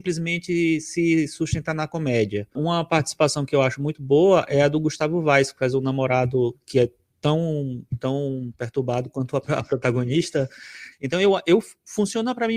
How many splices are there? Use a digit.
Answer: 1